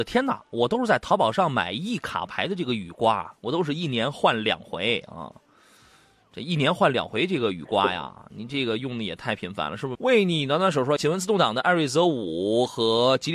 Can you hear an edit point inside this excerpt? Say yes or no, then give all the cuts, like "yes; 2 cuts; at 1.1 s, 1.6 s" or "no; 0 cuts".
yes; 2 cuts; at 9.9 s, 11.0 s